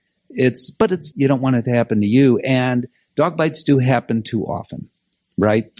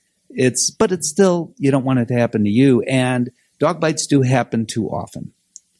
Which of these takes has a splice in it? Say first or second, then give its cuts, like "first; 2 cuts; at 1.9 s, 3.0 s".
first; 1 cut; at 1.1 s